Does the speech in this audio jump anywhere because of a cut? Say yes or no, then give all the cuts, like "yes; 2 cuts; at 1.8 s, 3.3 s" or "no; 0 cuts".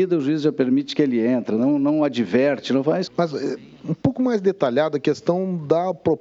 yes; 1 cut; at 3.1 s